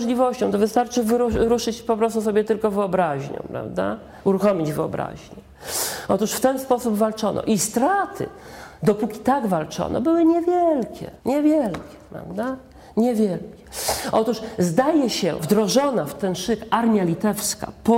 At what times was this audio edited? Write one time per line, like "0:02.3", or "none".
0:11.2
0:15.4